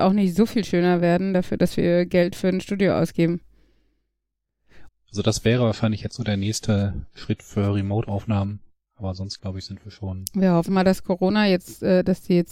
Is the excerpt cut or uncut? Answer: cut